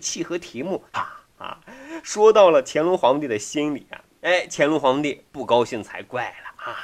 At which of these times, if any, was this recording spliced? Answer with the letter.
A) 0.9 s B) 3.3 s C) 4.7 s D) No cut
A